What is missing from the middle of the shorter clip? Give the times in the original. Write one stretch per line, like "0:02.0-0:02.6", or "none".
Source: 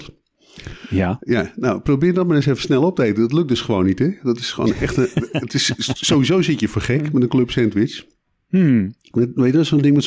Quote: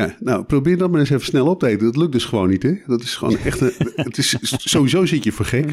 none